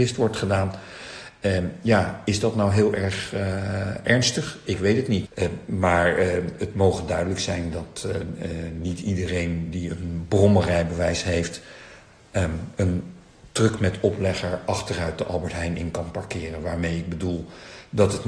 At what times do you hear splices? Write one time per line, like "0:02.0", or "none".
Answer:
0:05.3